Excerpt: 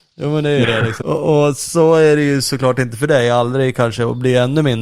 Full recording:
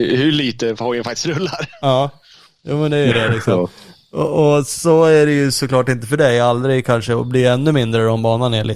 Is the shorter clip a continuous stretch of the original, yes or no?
no